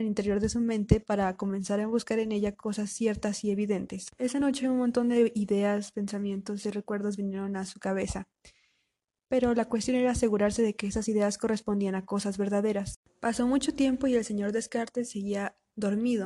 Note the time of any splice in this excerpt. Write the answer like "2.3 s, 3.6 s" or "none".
none